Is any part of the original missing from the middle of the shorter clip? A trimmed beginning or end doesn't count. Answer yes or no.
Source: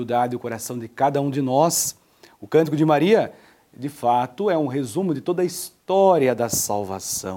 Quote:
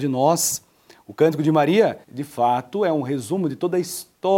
yes